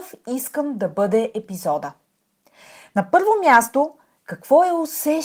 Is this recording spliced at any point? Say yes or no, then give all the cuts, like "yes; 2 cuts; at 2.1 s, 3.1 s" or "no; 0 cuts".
no; 0 cuts